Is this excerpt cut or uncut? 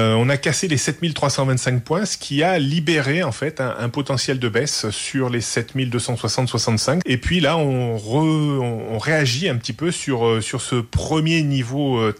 cut